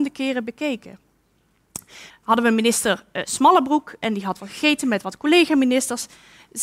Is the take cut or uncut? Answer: cut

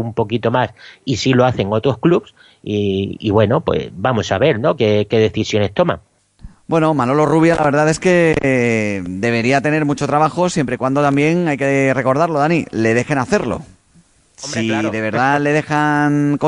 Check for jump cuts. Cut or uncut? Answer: uncut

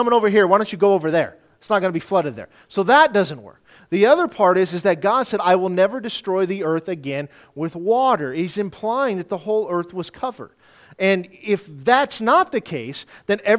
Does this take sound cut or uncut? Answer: uncut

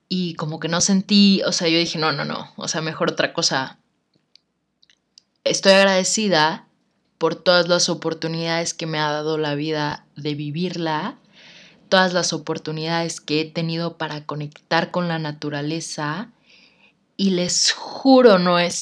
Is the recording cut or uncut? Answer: uncut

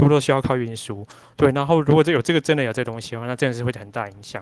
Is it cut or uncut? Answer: uncut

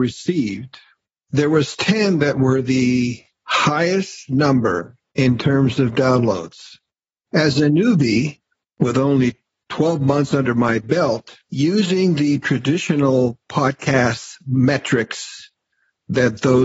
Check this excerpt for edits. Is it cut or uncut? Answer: cut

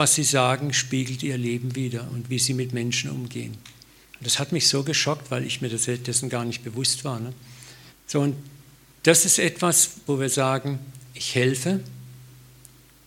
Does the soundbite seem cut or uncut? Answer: cut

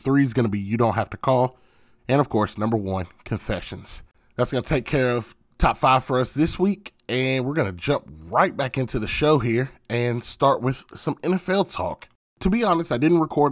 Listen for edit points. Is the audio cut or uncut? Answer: cut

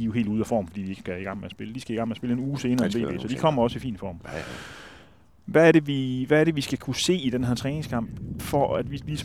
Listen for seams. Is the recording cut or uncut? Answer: uncut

